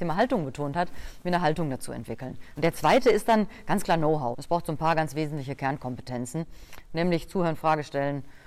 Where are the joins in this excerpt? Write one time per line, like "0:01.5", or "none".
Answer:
0:02.6
0:04.3